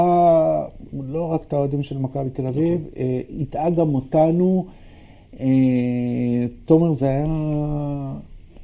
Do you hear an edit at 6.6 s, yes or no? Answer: no